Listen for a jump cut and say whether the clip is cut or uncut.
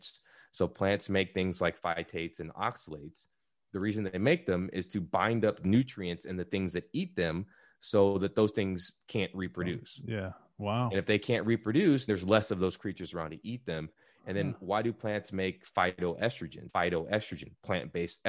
cut